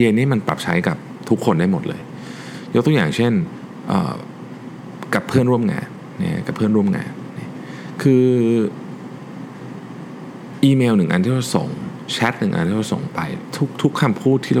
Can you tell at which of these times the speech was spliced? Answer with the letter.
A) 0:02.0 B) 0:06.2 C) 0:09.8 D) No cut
D